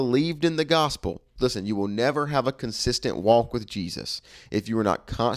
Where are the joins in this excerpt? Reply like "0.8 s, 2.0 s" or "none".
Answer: 1.4 s